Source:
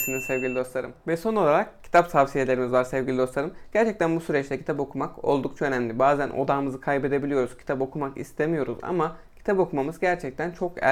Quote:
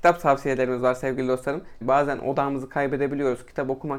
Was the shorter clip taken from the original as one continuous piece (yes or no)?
no